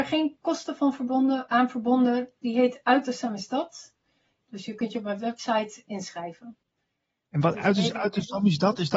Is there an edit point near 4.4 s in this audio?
yes; 1 cut; at 4.4 s

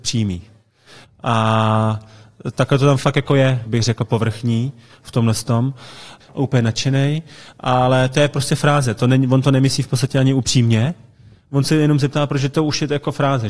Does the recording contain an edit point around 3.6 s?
yes; 3 cuts; at 1.0 s, 3.6 s, 6.2 s

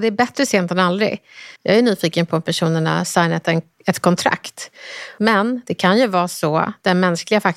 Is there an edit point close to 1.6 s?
yes; 2 cuts; at 1.6 s, 5.2 s

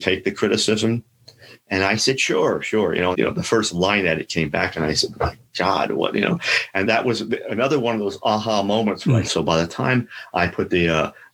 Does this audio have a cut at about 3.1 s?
yes; 3 cuts; at 3.1 s, 6.8 s, 9.2 s

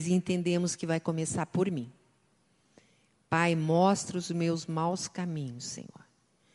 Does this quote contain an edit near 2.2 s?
no; 0 cuts

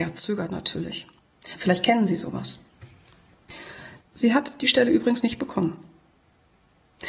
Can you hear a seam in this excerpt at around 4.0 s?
yes; 2 cuts; at 1.6 s, 4.0 s

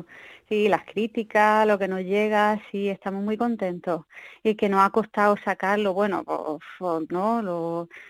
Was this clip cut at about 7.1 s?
yes; 1 cut; at 7.1 s

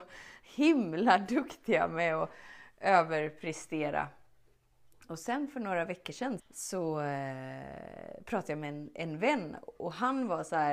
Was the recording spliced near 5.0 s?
no; 1 cut; at 6.4 s

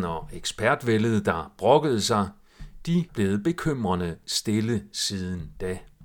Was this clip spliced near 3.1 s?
yes; 1 cut; at 3.1 s

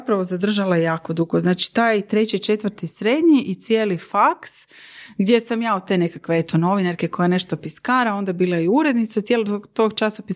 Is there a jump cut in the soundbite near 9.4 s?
no; 0 cuts

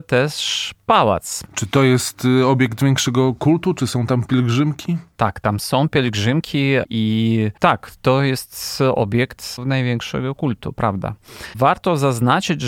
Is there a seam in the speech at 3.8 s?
no; 1 cut; at 1.5 s

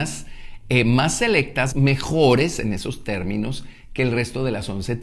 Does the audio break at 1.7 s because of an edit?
yes; 1 cut; at 1.7 s

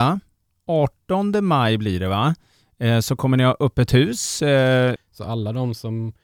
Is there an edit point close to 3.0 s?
no; 1 cut; at 5.0 s

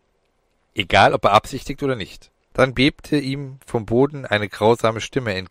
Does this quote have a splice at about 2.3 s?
yes; 1 cut; at 2.3 s

